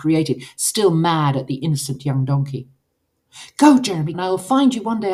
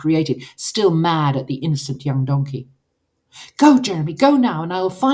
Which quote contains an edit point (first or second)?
first